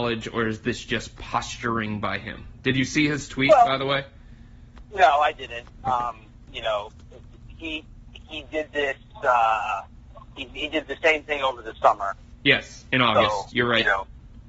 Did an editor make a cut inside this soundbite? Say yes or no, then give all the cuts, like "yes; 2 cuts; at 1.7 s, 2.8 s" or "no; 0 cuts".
no; 0 cuts